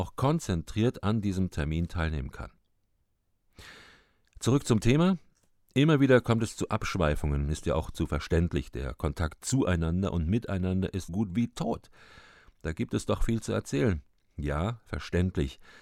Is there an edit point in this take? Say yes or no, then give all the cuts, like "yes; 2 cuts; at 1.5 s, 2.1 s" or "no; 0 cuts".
yes; 1 cut; at 11.1 s